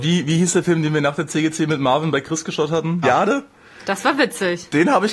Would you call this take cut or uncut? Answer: cut